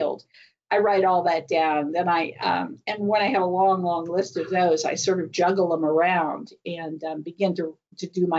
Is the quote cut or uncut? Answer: uncut